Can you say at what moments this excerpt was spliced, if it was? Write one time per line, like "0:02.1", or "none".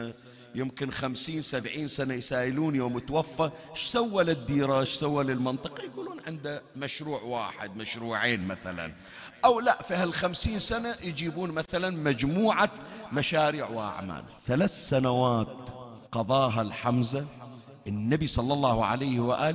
0:14.4
0:16.1